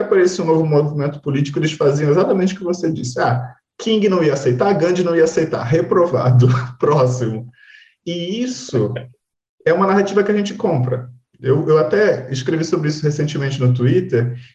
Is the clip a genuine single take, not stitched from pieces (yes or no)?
yes